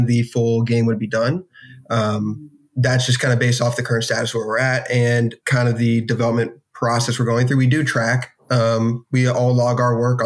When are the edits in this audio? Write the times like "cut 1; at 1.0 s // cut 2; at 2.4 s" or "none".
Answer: cut 1; at 5.4 s